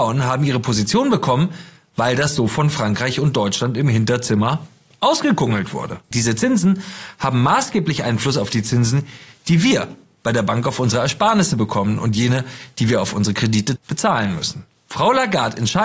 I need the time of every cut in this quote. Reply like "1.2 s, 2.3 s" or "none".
6.1 s, 13.8 s